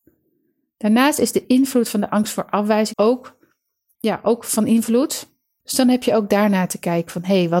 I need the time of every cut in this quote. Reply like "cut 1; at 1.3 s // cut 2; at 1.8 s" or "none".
cut 1; at 2.9 s // cut 2; at 5.6 s

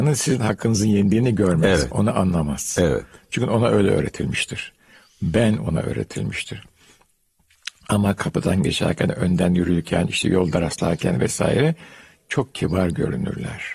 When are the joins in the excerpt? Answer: none

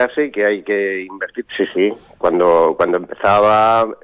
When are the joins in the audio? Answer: cut 1; at 1.5 s

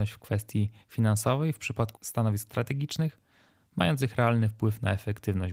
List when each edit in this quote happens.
cut 1; at 1.9 s

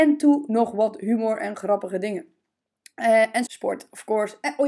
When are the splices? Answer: cut 1; at 3.5 s

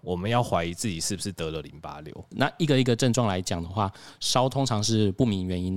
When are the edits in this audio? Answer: cut 1; at 2.3 s

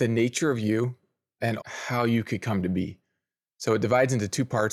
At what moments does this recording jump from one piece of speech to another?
cut 1; at 1.6 s

